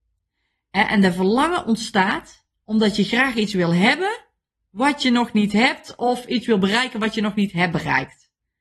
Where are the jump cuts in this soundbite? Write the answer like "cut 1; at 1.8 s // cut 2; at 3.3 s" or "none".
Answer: none